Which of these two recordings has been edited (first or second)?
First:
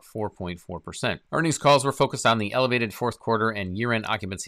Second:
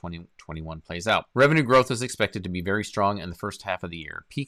second